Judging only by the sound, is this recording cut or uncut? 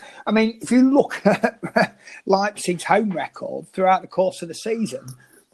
uncut